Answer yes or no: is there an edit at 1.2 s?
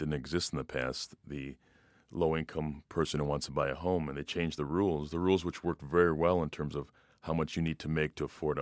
no